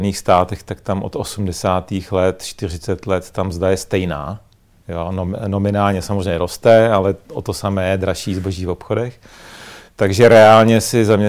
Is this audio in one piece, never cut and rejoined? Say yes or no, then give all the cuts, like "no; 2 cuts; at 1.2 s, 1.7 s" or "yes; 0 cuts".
yes; 0 cuts